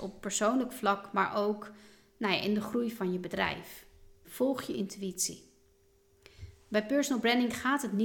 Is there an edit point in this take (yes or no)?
yes